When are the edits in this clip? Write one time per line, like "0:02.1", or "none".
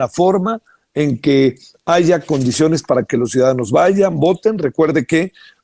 none

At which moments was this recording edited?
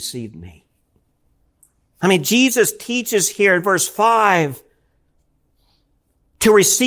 none

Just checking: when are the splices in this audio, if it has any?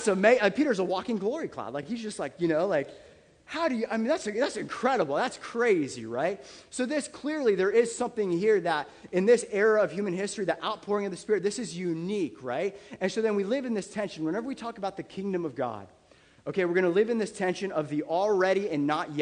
none

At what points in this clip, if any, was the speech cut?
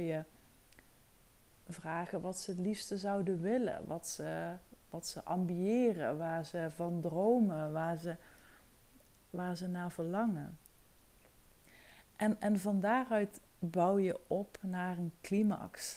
0:12.1
0:13.5

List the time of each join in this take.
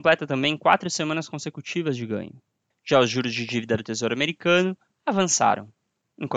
0:02.7

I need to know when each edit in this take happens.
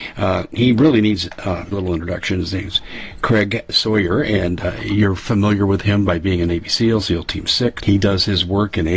0:01.7
0:07.8

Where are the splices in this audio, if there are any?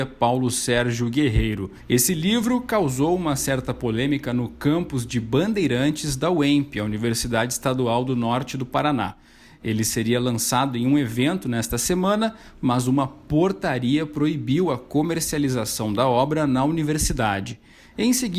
none

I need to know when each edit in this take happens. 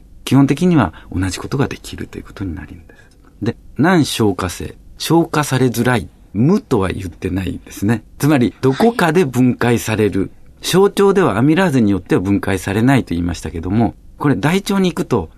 none

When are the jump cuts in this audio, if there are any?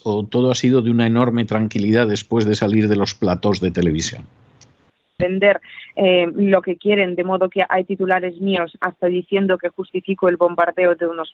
0:05.2

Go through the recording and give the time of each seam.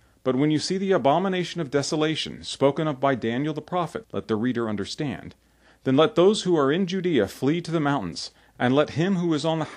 0:04.0

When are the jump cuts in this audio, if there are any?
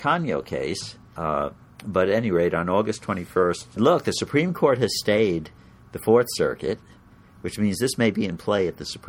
0:01.2
0:03.8

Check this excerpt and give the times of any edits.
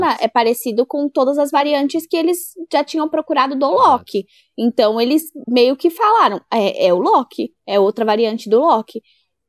none

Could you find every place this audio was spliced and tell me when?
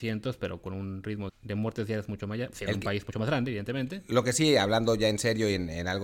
0:01.3
0:02.5

